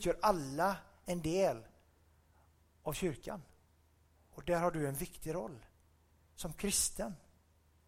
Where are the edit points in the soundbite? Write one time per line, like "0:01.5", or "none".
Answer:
none